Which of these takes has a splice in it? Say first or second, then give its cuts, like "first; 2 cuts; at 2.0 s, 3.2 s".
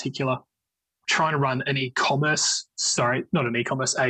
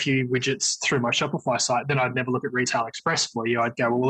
first; 1 cut; at 1.1 s